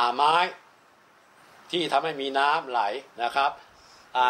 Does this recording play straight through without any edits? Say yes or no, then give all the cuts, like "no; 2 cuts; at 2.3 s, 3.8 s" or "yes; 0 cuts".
no; 1 cut; at 3.1 s